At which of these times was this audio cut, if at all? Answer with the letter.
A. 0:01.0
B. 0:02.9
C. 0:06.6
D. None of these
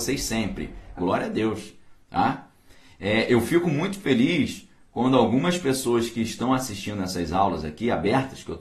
A